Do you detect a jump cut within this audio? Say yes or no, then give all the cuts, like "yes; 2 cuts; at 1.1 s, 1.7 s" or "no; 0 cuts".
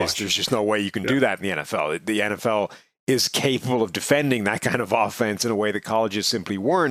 no; 0 cuts